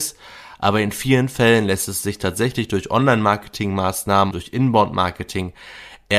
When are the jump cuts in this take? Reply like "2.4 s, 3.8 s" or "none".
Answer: 4.3 s